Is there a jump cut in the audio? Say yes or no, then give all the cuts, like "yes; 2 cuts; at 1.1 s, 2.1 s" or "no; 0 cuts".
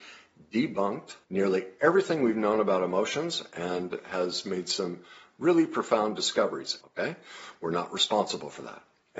yes; 2 cuts; at 1.2 s, 6.8 s